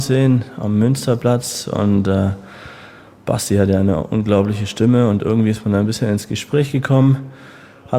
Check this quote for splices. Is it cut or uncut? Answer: uncut